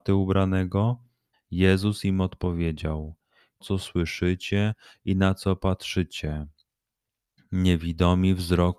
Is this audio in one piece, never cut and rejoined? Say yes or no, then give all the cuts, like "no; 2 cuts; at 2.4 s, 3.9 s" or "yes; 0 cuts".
no; 2 cuts; at 1.3 s, 3.6 s